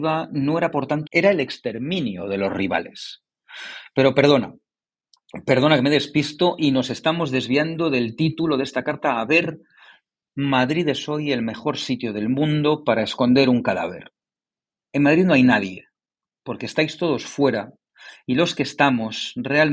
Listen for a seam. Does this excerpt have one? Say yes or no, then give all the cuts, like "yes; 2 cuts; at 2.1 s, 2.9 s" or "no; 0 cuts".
yes; 1 cut; at 1.1 s